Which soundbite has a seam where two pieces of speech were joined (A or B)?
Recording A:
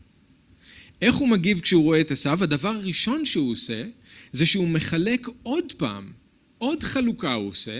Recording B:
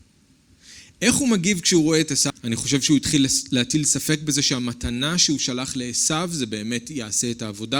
B